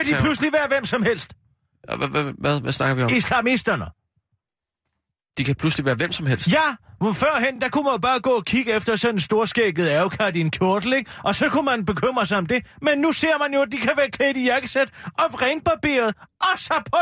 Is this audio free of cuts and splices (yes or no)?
yes